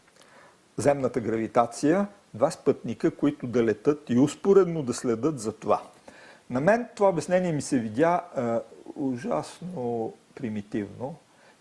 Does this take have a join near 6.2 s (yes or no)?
no